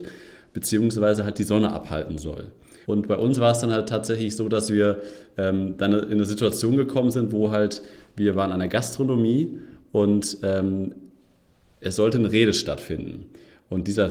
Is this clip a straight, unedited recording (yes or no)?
no